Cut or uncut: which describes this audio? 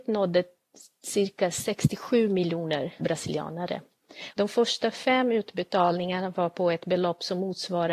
cut